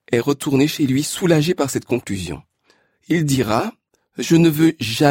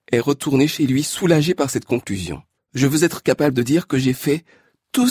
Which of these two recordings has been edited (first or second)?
second